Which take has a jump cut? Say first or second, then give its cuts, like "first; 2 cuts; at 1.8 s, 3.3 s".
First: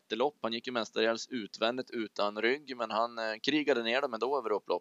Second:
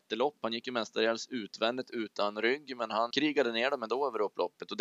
second; 1 cut; at 3.1 s